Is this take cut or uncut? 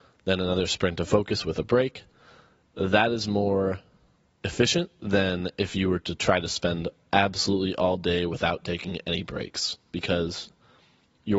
uncut